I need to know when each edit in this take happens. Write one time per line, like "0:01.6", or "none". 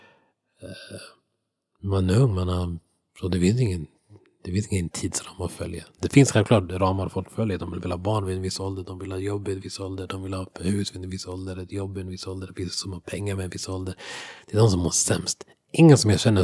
none